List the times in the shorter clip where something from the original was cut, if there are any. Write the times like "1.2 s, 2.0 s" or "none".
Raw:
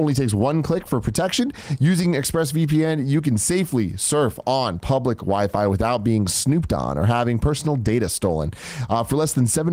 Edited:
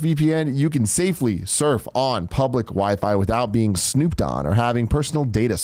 none